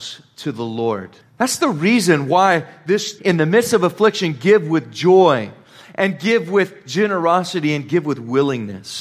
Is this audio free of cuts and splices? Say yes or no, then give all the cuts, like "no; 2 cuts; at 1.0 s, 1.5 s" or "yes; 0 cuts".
no; 2 cuts; at 1.2 s, 3.2 s